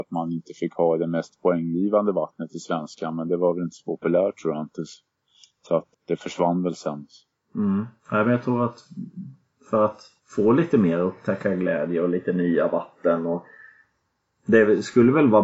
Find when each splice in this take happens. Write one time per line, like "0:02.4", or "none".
0:05.9
0:08.0
0:10.2